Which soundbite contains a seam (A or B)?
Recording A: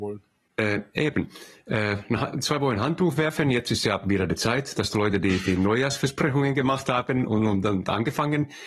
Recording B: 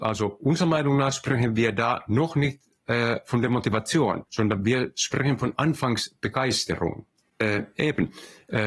B